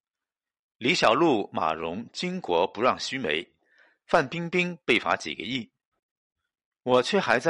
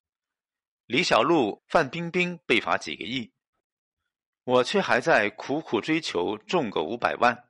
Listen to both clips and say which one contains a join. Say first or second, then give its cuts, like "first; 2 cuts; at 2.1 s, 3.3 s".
second; 1 cut; at 1.6 s